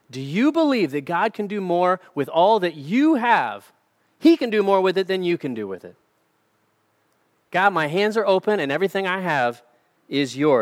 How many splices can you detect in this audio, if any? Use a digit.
0